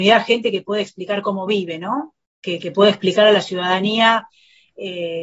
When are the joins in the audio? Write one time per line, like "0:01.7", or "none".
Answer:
none